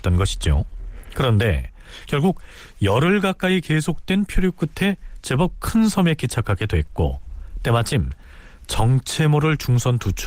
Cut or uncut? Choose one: uncut